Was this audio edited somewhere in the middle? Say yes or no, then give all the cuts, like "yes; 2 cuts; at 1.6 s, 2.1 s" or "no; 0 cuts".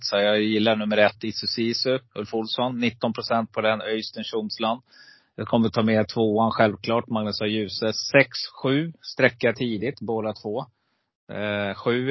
no; 0 cuts